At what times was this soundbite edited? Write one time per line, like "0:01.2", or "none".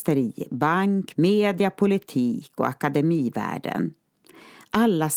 0:01.1

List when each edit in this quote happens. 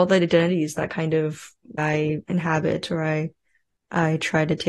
0:01.8

